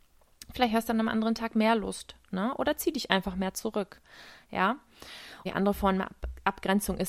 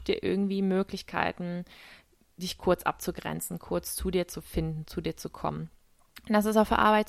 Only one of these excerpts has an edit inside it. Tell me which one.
first; 1 cut; at 5.5 s

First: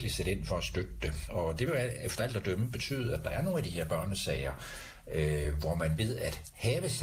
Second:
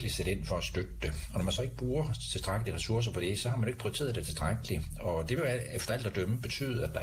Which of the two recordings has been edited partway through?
first; 1 cut; at 1.3 s

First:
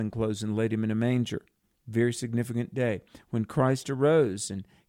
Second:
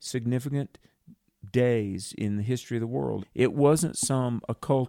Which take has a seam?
second; 1 cut; at 3.2 s

